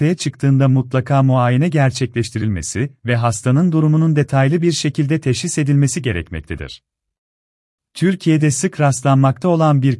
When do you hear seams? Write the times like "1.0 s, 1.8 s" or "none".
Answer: 7.8 s